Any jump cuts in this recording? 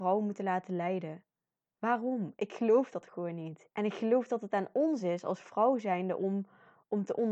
yes; 1 cut; at 3.7 s

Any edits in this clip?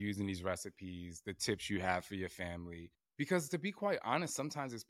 no; 0 cuts

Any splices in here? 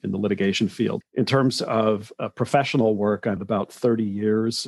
yes; 2 cuts; at 1.0 s, 3.4 s

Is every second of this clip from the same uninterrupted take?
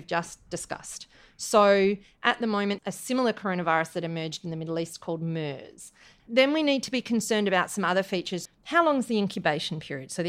no; 3 cuts; at 2.8 s, 6.2 s, 8.5 s

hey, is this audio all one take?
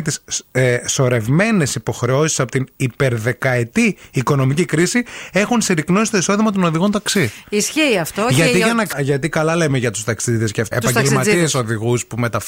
no; 2 cuts; at 8.9 s, 10.7 s

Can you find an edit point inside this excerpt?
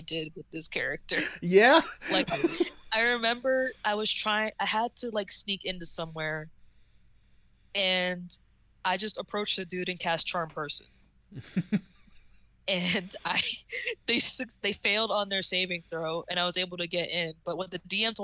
no; 0 cuts

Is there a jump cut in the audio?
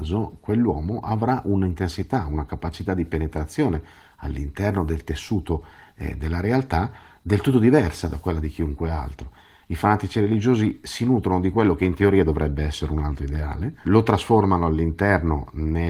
yes; 2 cuts; at 9.6 s, 13.8 s

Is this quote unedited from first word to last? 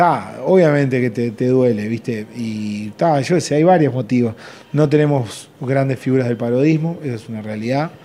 yes; 0 cuts

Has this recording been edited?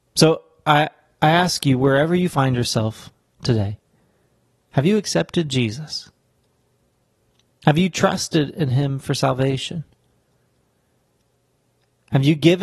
no; 0 cuts

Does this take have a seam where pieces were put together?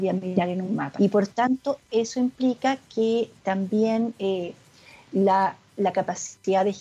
yes; 1 cut; at 1.0 s

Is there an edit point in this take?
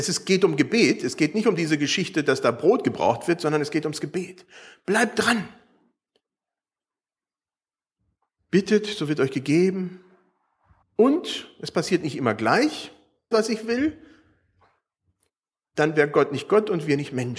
yes; 2 cuts; at 10.8 s, 13.3 s

